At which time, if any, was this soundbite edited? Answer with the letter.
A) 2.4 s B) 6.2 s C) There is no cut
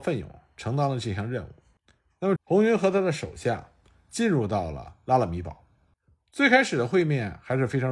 A